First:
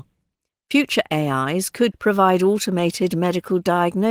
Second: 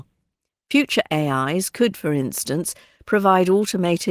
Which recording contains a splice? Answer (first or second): first